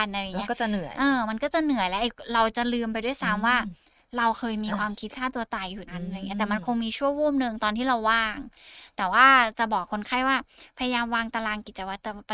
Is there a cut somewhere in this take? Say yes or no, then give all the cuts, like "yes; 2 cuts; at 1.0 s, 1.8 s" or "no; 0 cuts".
yes; 1 cut; at 5.9 s